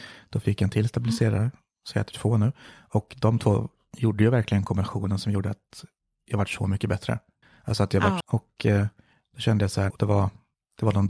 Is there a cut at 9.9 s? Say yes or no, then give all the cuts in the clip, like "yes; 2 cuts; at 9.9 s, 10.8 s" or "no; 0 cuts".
yes; 2 cuts; at 8.2 s, 9.9 s